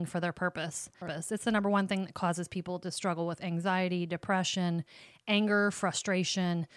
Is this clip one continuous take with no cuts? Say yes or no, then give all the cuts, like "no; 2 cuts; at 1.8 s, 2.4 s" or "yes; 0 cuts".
no; 1 cut; at 1.0 s